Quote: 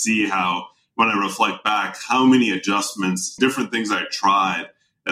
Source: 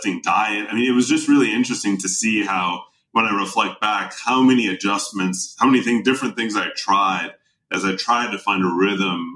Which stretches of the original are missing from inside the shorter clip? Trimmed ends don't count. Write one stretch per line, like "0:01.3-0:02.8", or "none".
0:05.6-0:06.0